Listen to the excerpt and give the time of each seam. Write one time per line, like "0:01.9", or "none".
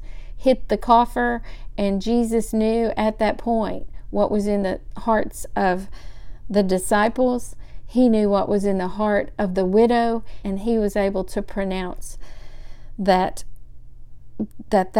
0:10.4